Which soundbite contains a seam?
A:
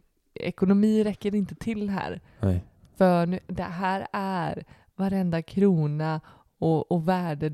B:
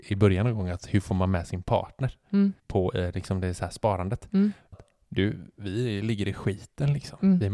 B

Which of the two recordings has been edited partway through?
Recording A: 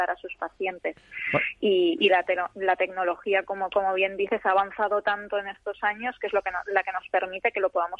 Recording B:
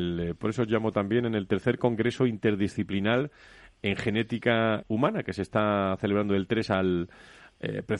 B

